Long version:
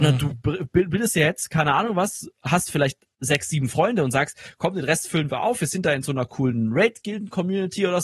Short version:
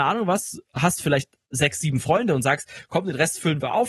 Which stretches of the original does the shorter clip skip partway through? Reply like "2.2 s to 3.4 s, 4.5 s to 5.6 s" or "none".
none